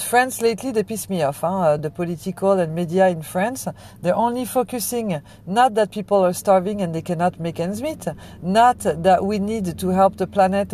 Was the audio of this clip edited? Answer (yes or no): no